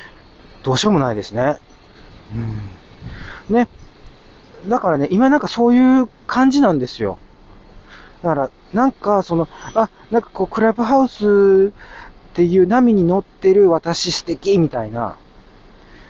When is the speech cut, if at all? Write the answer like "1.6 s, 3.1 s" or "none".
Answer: none